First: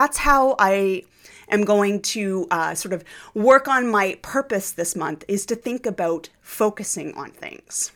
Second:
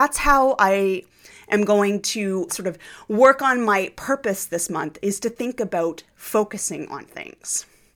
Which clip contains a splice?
second; 1 cut; at 2.5 s

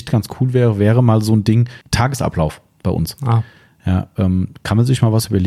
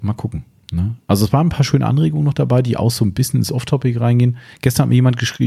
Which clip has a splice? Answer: first; 1 cut; at 1.8 s

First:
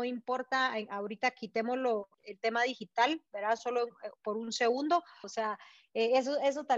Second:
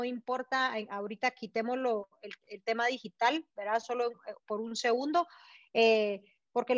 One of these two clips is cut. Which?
first; 2 cuts; at 2.1 s, 5.2 s

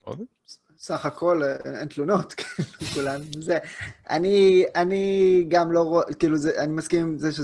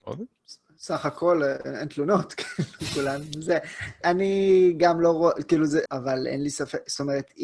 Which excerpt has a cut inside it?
second; 2 cuts; at 4.0 s, 5.8 s

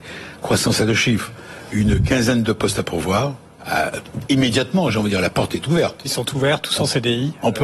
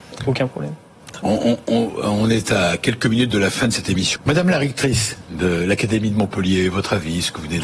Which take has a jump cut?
second; 1 cut; at 4.2 s

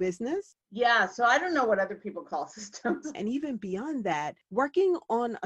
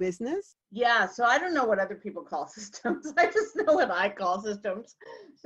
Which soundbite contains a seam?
first; 1 cut; at 3.1 s

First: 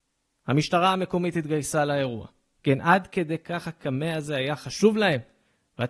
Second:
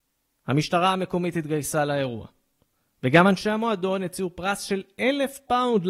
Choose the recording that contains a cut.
first; 1 cut; at 2.5 s

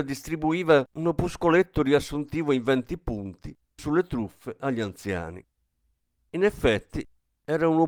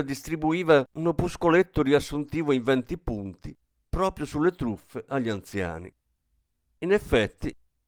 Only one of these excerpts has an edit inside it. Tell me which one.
first; 1 cut; at 3.8 s

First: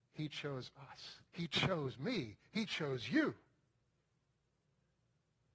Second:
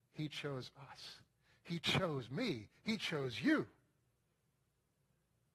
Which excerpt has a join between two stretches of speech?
first; 1 cut; at 1.3 s

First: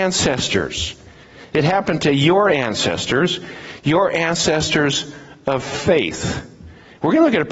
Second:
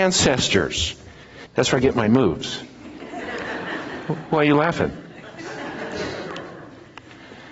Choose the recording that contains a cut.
second; 1 cut; at 1.5 s

